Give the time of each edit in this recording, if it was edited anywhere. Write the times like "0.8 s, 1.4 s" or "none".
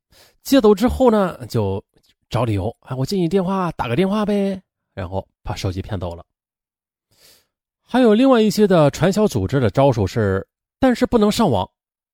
10.6 s